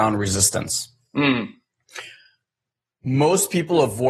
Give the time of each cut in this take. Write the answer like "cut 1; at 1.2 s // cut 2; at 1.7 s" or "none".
none